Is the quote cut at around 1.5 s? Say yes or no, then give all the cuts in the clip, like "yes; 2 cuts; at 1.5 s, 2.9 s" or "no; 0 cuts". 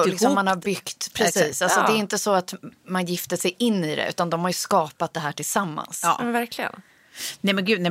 no; 0 cuts